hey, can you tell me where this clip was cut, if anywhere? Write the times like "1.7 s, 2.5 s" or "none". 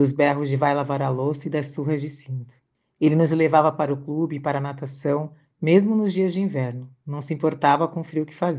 none